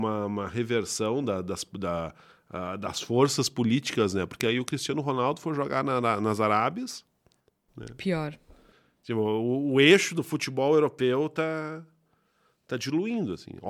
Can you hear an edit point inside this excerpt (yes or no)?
no